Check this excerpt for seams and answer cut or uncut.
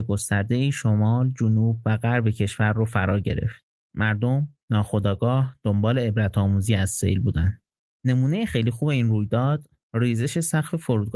cut